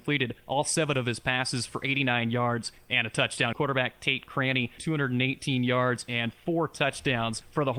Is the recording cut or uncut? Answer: cut